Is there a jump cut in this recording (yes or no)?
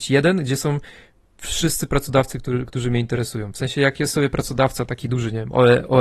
no